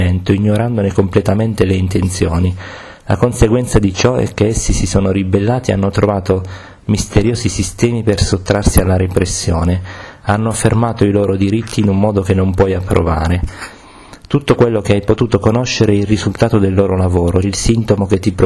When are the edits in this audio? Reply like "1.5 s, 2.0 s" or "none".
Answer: 17.4 s